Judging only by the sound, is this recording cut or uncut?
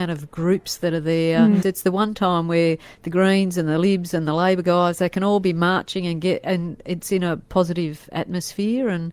cut